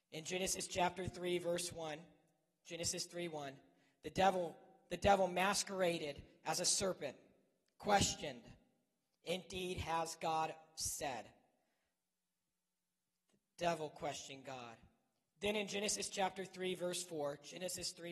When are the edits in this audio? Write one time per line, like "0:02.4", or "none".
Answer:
none